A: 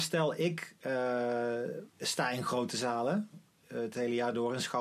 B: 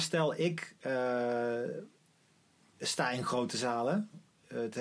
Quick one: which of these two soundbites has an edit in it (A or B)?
A